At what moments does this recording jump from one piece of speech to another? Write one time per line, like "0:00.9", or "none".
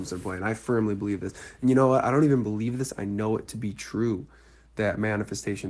none